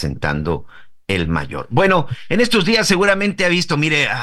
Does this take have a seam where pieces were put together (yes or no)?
no